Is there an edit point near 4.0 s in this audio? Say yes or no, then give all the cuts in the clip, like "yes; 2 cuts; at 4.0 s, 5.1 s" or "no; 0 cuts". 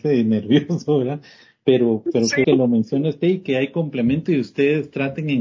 no; 1 cut; at 2.4 s